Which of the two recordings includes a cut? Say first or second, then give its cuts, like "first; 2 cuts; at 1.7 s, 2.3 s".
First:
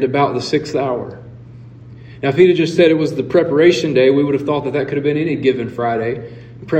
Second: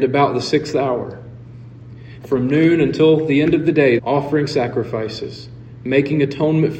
second; 2 cuts; at 2.2 s, 4.0 s